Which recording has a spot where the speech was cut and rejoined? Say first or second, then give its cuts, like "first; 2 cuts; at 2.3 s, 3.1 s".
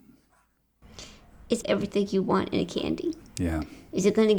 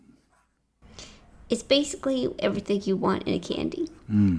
first; 2 cuts; at 1.6 s, 3.2 s